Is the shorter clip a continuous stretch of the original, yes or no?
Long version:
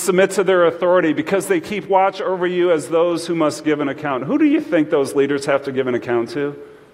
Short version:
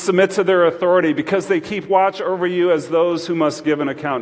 yes